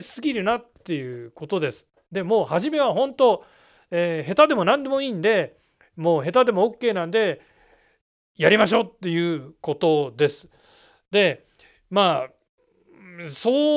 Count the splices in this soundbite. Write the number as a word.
zero